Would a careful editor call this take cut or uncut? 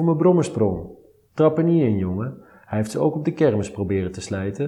cut